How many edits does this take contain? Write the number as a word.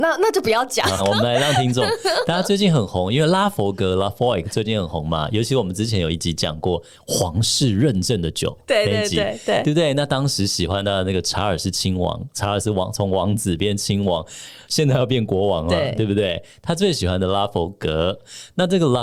one